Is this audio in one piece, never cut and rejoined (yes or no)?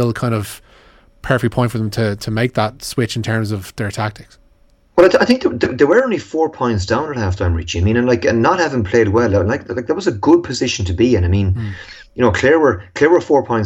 yes